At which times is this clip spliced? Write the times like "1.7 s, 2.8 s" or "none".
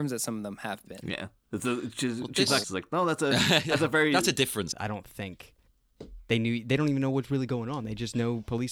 2.6 s, 4.7 s